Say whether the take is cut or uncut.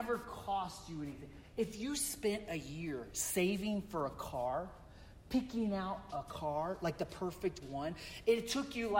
uncut